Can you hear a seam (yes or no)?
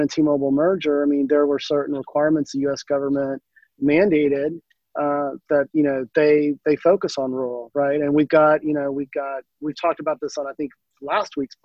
no